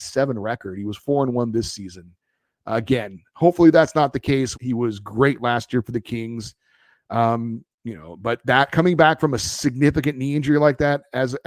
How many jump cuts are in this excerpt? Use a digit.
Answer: 1